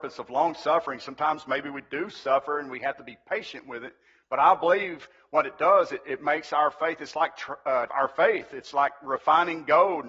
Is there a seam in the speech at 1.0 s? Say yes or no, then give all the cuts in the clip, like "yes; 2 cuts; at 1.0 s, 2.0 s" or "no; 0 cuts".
no; 1 cut; at 7.9 s